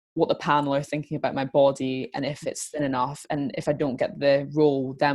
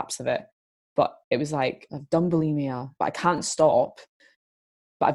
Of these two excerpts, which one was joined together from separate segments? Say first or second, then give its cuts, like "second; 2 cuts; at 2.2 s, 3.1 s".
second; 2 cuts; at 1.9 s, 3.0 s